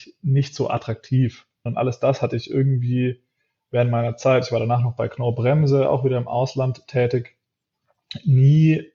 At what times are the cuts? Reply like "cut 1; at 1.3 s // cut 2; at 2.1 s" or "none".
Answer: cut 1; at 1.7 s